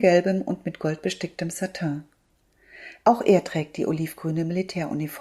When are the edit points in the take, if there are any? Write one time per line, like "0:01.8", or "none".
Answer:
0:03.0